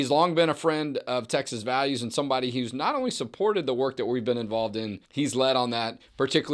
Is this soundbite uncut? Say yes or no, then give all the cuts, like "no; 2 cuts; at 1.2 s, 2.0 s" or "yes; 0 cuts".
no; 1 cut; at 5.1 s